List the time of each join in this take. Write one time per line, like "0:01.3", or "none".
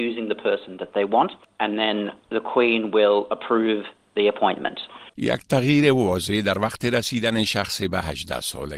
0:05.1